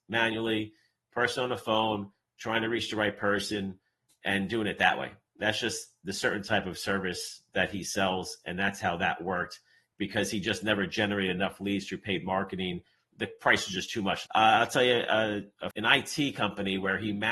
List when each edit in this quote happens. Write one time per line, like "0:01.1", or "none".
0:14.3
0:15.7